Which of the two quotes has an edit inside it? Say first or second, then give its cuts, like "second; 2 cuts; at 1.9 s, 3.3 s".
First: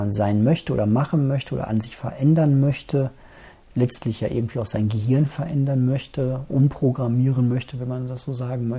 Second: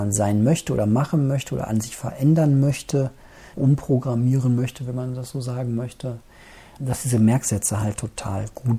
second; 2 cuts; at 3.5 s, 6.8 s